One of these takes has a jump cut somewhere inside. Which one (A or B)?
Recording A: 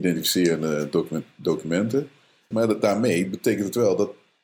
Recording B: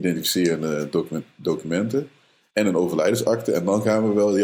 A